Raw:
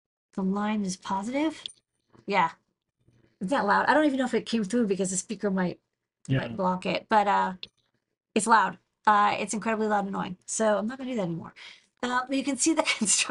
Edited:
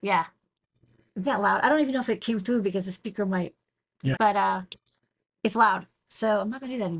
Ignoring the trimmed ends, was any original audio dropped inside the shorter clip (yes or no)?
yes